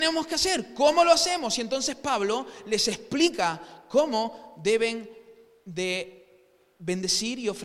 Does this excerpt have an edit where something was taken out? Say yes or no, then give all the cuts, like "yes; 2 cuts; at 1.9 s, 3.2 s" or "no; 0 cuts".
no; 0 cuts